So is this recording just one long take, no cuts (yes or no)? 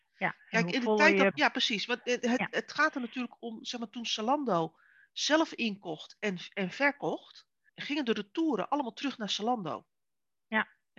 no